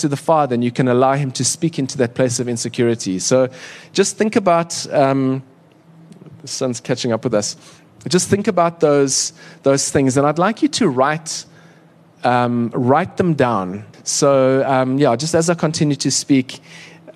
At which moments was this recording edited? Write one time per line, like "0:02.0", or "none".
0:13.9